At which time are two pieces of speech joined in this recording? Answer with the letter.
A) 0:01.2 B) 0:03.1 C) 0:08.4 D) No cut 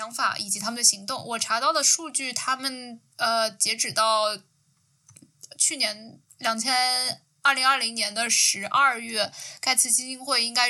B